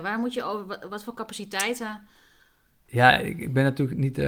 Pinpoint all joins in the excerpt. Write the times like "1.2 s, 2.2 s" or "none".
none